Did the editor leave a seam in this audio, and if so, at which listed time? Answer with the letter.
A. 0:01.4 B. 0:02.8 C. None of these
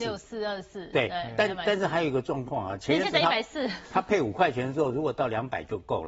C